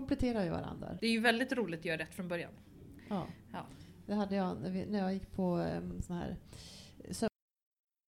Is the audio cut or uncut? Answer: cut